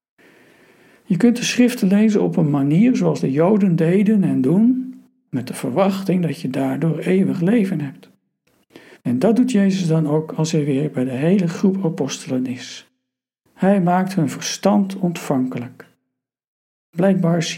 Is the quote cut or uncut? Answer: cut